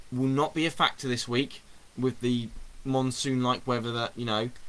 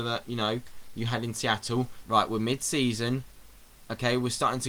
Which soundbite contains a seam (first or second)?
second